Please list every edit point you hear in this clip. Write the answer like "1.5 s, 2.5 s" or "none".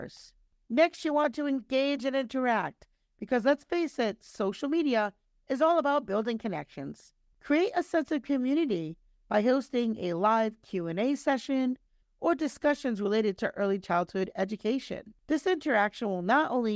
7.3 s, 12.0 s